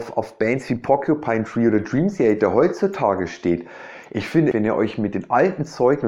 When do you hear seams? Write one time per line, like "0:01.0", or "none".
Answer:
0:04.5